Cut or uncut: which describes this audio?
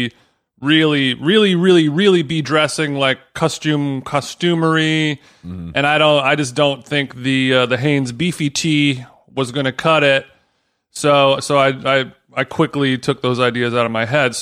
uncut